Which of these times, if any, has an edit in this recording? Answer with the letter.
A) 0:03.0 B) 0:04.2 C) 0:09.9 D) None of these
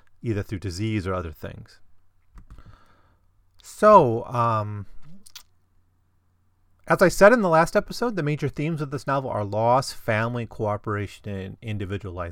D